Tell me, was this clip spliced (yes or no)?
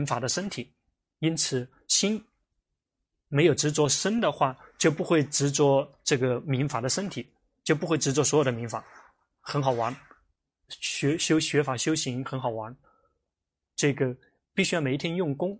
no